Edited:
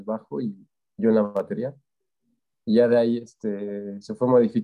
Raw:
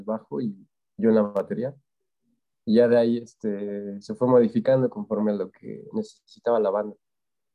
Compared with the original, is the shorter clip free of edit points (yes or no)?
yes